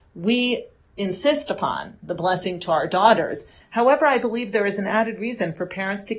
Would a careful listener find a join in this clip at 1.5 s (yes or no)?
no